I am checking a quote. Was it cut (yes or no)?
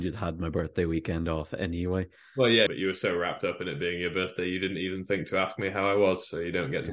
yes